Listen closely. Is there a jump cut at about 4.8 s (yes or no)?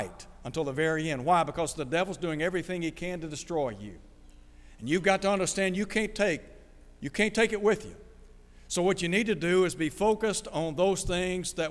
no